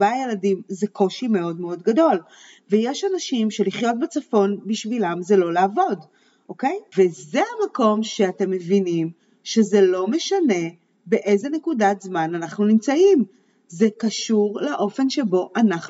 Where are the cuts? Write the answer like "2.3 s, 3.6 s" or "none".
6.9 s

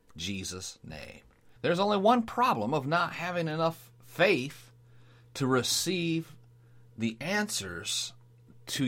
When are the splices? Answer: 1.6 s

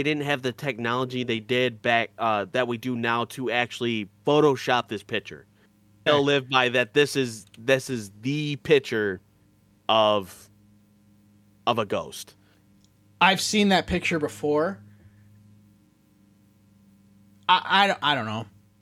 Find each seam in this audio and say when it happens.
6.1 s

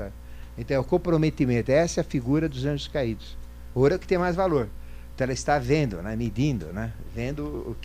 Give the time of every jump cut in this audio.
3.7 s

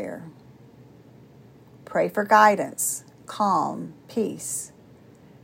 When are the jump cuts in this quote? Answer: none

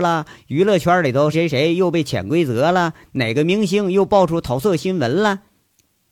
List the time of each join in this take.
1.3 s

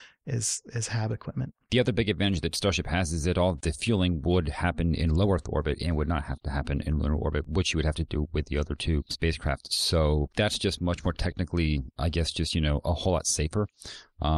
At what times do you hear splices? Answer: none

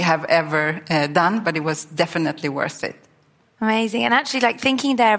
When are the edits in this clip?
none

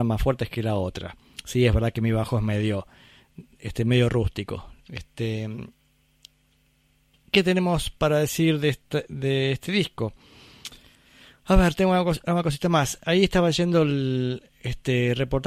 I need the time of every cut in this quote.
4.8 s

